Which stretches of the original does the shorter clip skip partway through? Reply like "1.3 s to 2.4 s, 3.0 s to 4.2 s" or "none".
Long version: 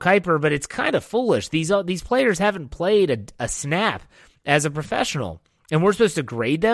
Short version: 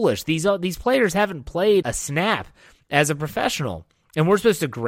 3.1 s to 3.4 s